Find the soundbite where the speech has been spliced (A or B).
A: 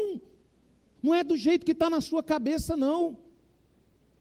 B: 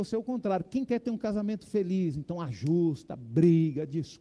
A